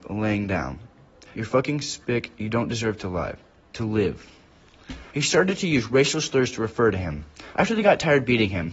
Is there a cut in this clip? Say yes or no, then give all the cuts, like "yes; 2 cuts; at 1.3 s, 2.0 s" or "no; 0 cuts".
yes; 3 cuts; at 1.3 s, 5.1 s, 7.5 s